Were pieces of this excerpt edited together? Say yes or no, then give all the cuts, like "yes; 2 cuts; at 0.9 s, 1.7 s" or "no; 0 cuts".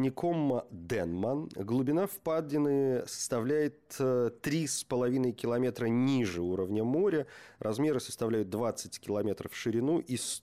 no; 0 cuts